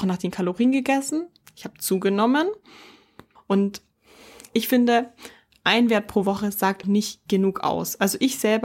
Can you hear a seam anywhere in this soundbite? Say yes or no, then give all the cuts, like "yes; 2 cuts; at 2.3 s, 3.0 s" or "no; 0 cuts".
yes; 2 cuts; at 3.4 s, 6.8 s